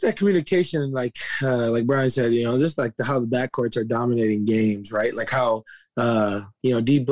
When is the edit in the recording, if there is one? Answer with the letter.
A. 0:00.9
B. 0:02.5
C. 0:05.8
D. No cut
D